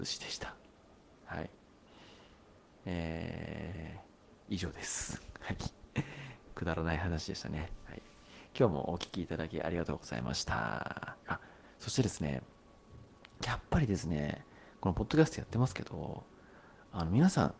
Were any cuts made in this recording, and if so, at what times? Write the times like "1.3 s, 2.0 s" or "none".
11.2 s